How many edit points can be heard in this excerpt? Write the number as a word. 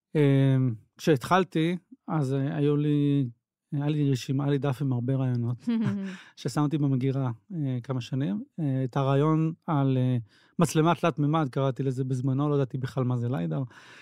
zero